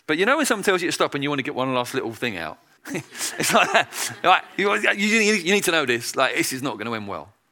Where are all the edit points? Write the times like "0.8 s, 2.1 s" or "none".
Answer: 2.8 s

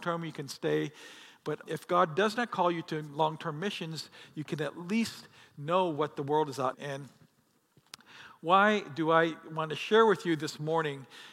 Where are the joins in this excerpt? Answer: 1.6 s, 6.7 s

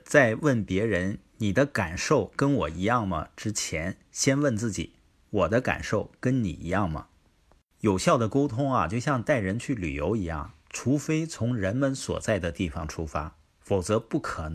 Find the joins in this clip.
none

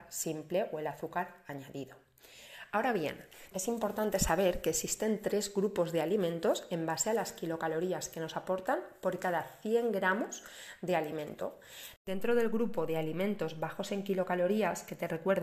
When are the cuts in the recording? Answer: 3.5 s, 12.0 s

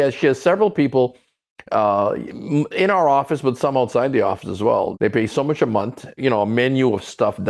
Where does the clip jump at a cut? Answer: 4.9 s, 6.2 s

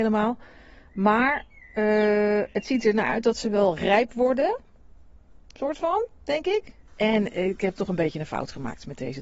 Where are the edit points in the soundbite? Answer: 6.9 s

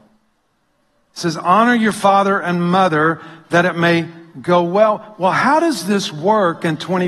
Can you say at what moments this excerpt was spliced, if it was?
none

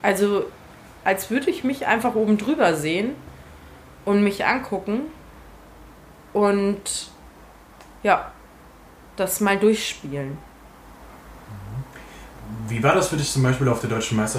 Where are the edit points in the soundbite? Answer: none

